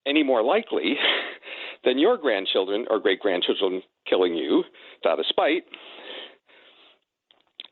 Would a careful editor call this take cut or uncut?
cut